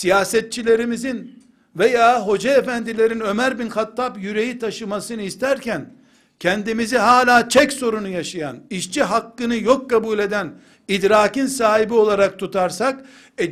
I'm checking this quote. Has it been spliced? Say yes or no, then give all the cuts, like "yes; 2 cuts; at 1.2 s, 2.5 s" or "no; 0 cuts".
no; 0 cuts